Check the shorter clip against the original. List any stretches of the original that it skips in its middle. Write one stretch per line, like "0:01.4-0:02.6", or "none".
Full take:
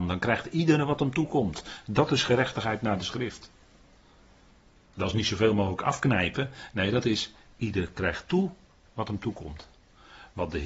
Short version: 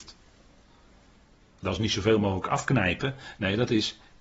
none

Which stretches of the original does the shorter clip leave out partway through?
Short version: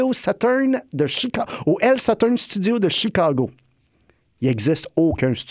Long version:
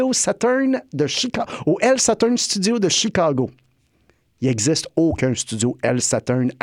none

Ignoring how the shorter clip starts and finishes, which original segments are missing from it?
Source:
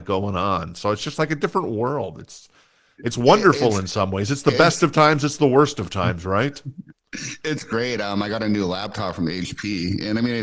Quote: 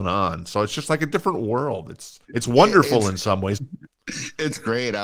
0:02.5-0:02.9
0:04.3-0:06.6

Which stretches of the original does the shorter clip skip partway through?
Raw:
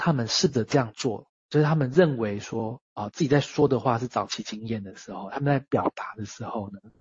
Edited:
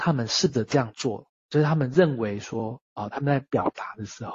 0:03.1-0:05.3

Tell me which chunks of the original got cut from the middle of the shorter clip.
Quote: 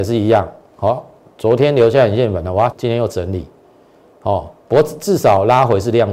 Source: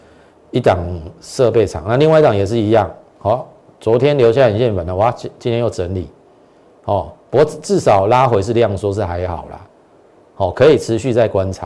0:05.1-0:05.3

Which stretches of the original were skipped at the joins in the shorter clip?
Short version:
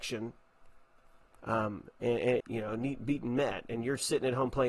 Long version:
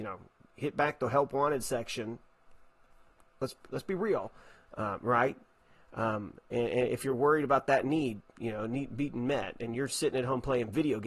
0:03.2-0:05.9
0:06.9-0:08.3

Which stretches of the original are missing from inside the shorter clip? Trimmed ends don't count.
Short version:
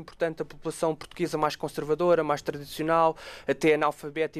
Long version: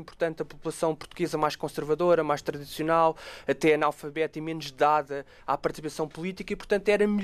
none

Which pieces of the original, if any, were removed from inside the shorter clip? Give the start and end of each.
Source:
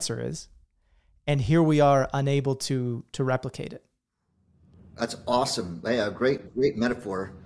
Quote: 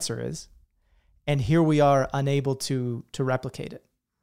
none

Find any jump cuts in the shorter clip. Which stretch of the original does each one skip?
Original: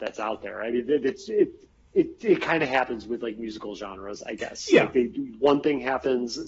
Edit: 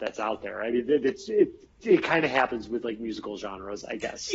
0:01.8-0:02.2

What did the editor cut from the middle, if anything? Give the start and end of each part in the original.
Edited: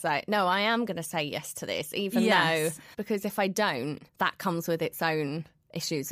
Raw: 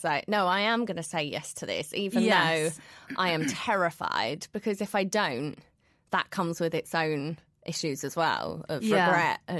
0:02.9-0:04.5
0:05.6-0:06.0

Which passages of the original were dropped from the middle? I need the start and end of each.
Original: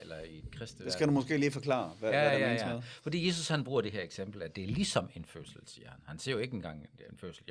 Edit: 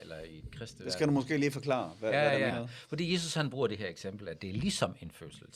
0:02.5-0:02.6

